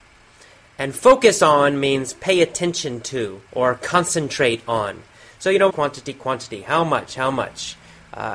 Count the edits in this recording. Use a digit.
3